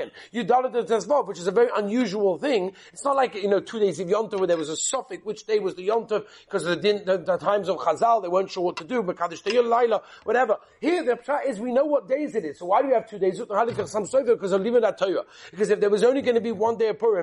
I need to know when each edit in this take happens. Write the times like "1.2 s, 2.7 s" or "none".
none